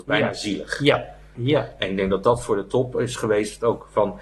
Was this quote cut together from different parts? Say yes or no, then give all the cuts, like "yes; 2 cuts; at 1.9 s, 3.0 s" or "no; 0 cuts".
yes; 1 cut; at 1.4 s